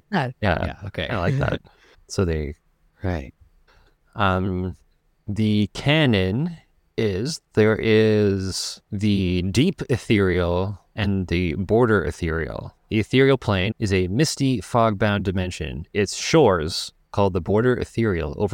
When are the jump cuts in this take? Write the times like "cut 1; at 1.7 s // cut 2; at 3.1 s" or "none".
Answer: cut 1; at 1.9 s // cut 2; at 3.7 s // cut 3; at 13.7 s